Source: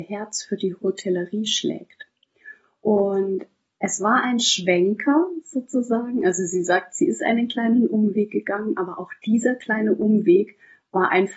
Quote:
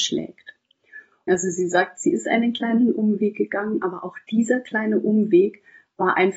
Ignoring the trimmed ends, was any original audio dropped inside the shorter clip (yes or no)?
yes